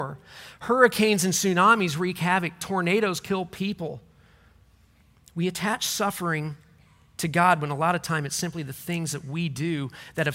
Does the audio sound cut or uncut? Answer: uncut